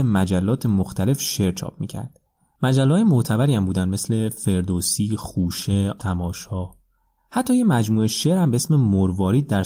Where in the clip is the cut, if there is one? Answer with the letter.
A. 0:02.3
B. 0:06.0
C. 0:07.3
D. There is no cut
B